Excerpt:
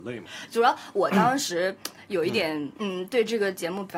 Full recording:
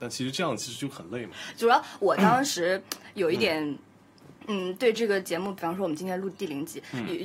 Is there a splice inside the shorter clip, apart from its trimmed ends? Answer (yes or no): yes